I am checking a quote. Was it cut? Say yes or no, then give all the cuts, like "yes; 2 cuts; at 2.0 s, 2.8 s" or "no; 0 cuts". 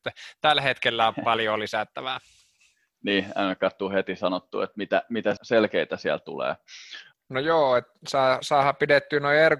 yes; 2 cuts; at 5.4 s, 7.1 s